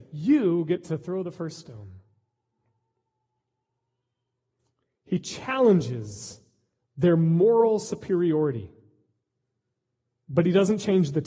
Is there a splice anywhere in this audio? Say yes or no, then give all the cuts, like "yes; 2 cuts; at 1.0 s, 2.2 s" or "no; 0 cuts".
no; 0 cuts